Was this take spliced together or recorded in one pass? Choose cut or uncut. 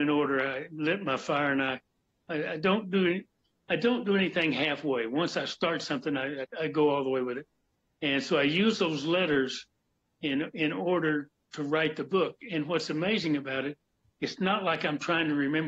cut